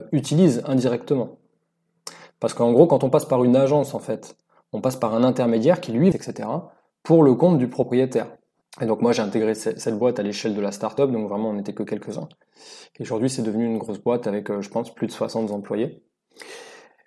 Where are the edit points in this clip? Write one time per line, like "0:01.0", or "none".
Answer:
0:06.1
0:08.6